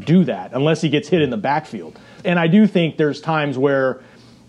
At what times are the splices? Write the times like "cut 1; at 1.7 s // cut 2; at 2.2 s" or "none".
cut 1; at 2.2 s